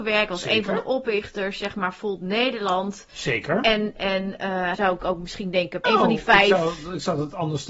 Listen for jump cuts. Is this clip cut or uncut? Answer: cut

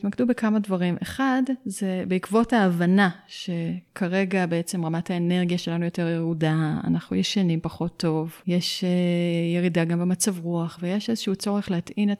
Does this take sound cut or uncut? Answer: uncut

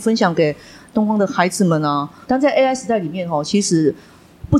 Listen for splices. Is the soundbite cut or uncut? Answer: cut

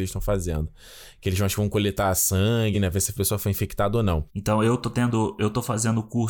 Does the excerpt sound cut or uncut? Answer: cut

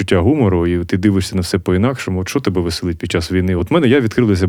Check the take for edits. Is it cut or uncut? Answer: uncut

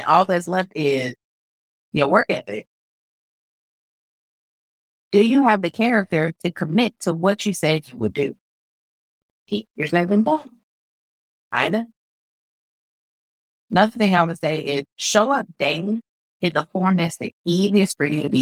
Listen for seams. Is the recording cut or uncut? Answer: uncut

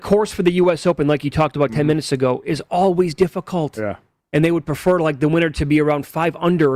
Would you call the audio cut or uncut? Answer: uncut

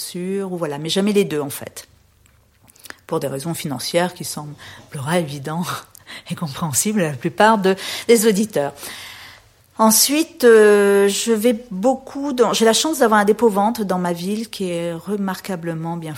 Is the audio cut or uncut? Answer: cut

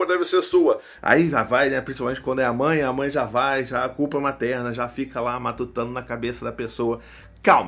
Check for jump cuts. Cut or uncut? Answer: uncut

